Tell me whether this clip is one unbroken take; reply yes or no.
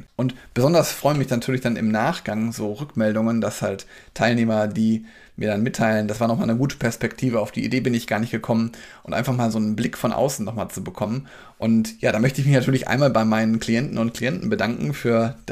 yes